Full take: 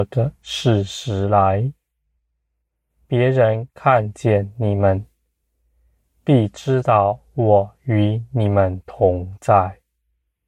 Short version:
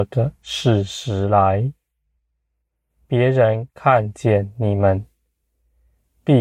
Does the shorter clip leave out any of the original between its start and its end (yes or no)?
no